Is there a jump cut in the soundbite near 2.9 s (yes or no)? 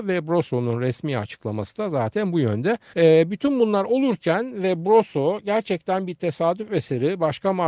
yes